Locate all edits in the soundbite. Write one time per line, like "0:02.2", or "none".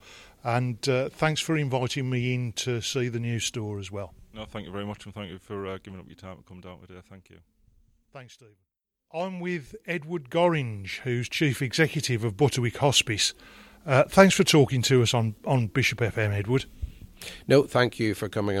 none

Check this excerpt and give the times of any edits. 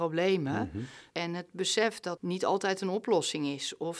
0:01.1
0:02.2

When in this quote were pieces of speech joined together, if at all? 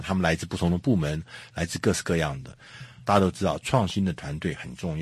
0:01.5
0:03.0

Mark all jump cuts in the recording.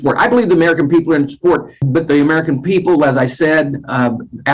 none

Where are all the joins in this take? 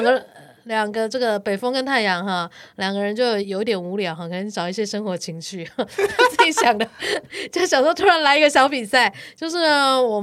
0:03.4

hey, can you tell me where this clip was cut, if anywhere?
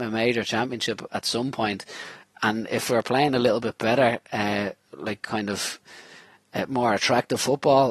none

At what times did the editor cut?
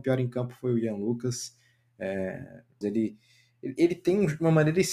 0:02.8

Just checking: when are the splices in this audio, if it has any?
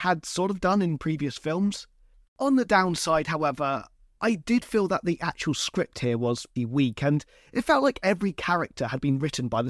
0:02.3
0:06.6

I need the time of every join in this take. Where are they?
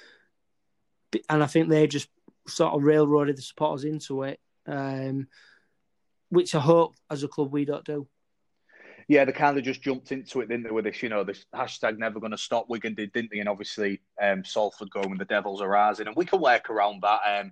none

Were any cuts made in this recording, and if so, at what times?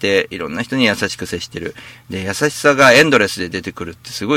none

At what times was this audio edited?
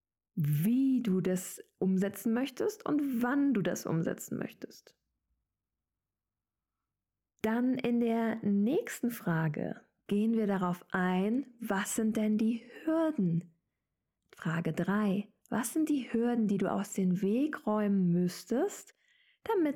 none

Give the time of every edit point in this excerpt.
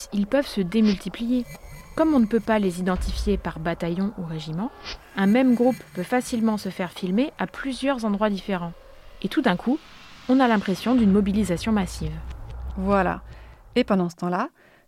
none

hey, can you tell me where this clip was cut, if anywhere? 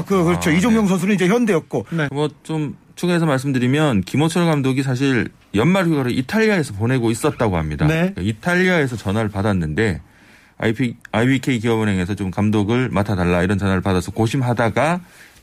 0:02.1

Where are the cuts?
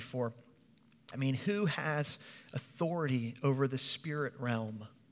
0:01.1

